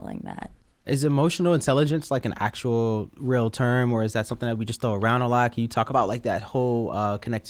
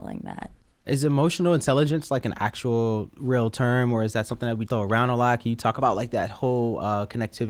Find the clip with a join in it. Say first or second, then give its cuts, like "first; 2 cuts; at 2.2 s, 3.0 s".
second; 1 cut; at 4.7 s